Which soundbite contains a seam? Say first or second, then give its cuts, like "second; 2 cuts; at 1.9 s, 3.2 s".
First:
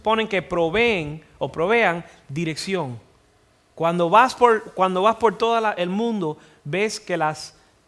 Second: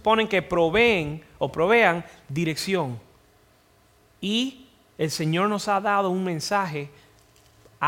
first; 1 cut; at 3.7 s